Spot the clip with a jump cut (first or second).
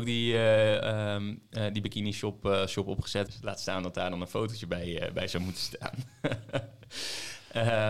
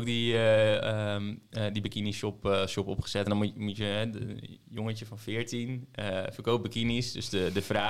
first